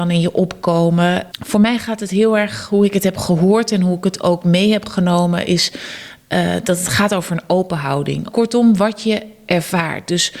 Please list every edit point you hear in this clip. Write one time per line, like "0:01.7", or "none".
0:01.3
0:08.3